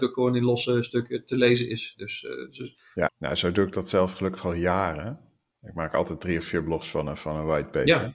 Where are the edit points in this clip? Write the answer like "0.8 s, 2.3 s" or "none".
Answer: 3.1 s